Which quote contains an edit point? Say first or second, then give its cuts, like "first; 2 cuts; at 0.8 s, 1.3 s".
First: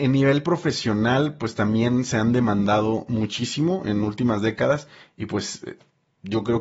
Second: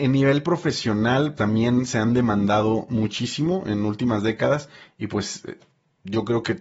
second; 1 cut; at 1.4 s